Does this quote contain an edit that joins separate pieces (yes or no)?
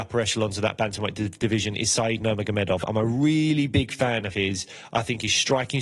no